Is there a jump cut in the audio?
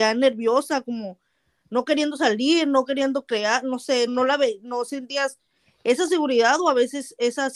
yes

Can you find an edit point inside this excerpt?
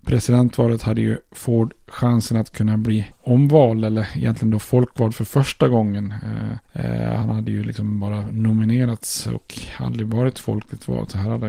yes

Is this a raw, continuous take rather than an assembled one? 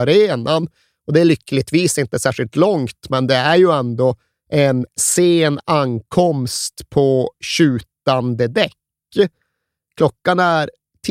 yes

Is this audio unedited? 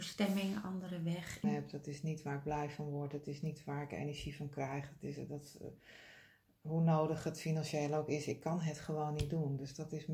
no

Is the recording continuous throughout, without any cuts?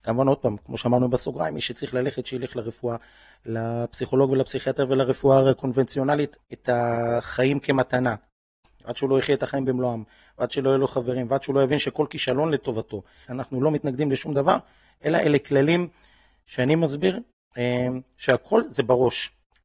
no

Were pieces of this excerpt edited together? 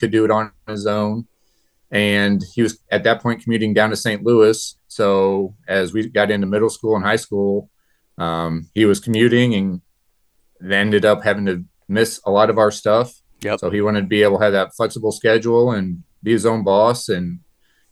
yes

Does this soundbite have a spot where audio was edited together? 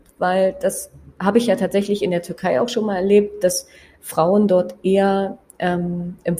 no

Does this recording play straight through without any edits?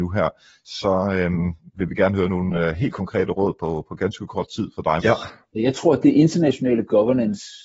no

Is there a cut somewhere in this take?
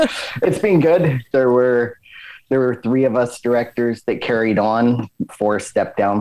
yes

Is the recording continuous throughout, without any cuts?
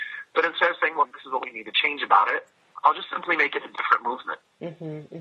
no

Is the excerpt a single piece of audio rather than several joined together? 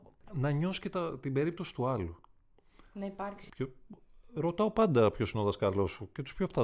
no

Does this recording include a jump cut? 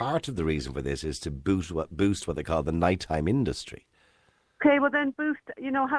no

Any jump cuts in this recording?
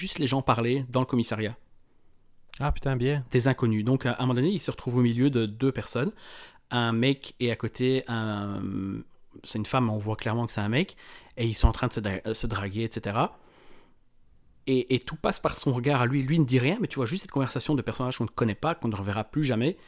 no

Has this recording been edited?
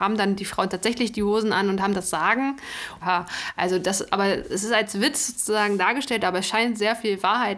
yes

